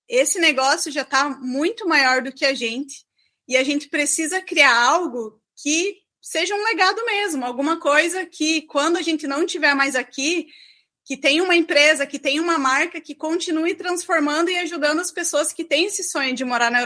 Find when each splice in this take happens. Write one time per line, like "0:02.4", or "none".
none